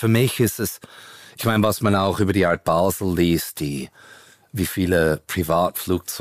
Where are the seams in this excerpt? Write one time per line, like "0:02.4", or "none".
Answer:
none